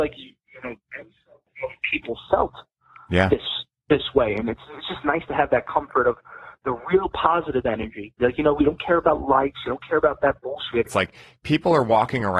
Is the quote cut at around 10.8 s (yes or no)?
yes